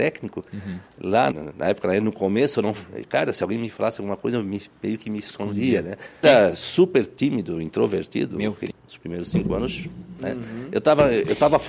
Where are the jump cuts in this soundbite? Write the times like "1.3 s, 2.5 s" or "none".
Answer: 1.3 s, 6.2 s, 8.7 s